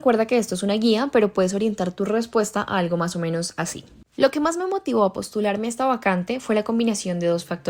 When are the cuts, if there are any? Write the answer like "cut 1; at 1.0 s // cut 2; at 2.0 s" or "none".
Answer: none